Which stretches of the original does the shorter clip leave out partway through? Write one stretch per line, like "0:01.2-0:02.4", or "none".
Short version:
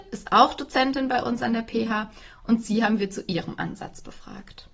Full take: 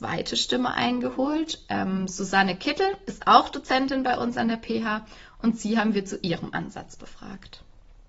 none